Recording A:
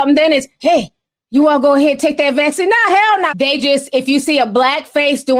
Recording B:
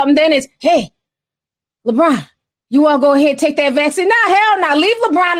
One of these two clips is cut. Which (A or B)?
A